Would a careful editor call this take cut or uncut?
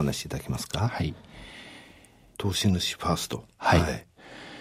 cut